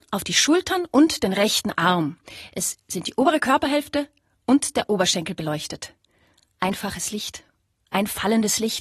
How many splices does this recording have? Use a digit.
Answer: 0